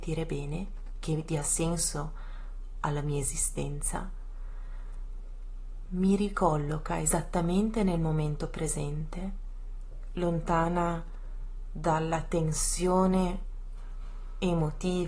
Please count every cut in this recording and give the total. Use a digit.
1